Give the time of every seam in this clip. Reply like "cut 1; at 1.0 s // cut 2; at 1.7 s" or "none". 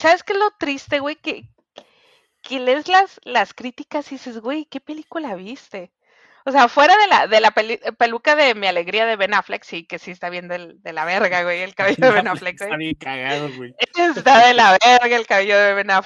none